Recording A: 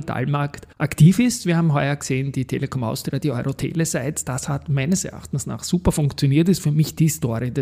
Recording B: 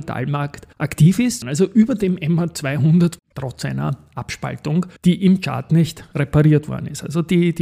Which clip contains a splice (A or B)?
B